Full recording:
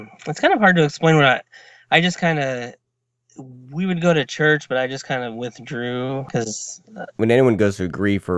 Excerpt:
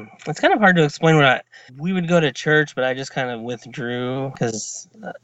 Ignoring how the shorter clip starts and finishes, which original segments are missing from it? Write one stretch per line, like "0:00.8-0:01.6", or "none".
0:01.7-0:03.6